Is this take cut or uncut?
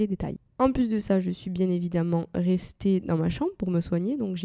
uncut